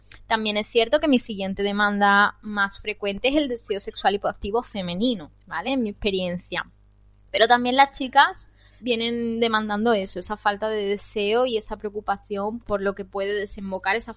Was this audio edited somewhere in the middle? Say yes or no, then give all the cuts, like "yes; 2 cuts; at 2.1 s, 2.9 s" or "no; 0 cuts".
yes; 3 cuts; at 5.7 s, 8.8 s, 12.6 s